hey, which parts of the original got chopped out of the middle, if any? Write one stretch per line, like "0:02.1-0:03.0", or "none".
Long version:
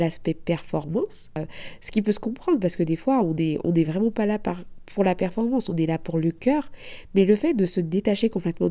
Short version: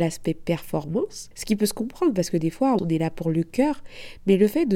0:01.3-0:01.8
0:03.2-0:05.7